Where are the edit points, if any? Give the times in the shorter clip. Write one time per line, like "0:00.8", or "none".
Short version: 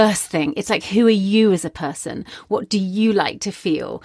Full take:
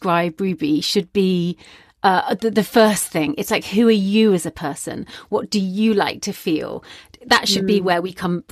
none